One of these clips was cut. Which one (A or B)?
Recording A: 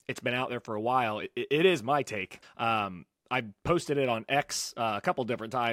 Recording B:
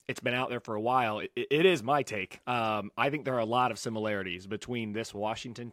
A